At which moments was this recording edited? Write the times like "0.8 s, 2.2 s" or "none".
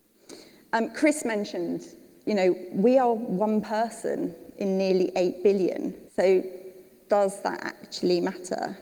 6.1 s